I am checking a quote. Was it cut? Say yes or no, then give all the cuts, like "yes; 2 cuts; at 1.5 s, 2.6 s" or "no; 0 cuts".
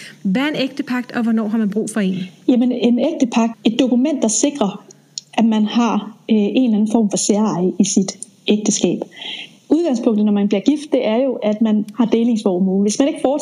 yes; 1 cut; at 3.5 s